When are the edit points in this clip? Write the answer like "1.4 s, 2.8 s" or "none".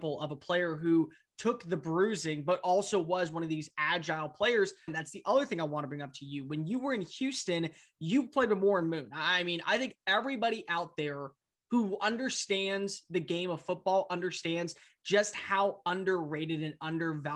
4.9 s